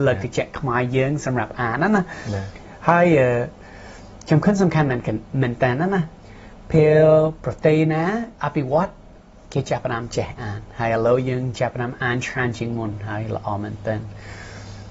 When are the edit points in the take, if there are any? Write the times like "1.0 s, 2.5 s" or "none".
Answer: none

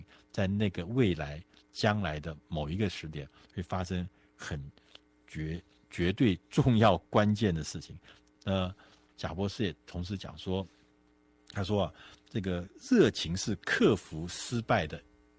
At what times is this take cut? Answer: 8.4 s

